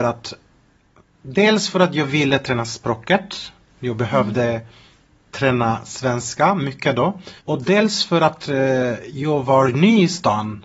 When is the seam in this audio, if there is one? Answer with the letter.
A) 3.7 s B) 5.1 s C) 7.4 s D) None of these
C